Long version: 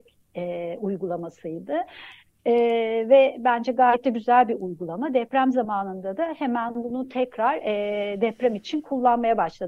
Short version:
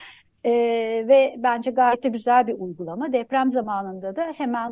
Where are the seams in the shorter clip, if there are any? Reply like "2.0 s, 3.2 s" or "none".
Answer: none